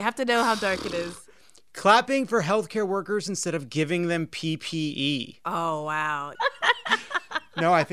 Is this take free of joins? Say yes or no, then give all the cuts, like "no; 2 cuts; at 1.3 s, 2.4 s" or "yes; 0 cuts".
no; 1 cut; at 6.4 s